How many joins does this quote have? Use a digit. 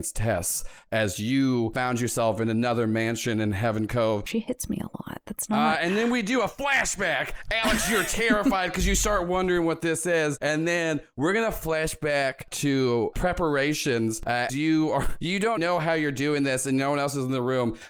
3